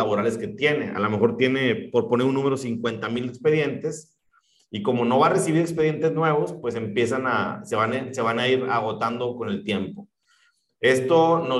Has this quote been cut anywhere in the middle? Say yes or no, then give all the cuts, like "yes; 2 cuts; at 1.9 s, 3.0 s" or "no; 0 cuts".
no; 0 cuts